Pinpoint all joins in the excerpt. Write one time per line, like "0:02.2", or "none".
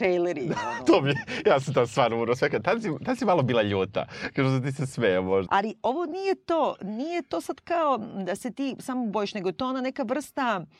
0:05.5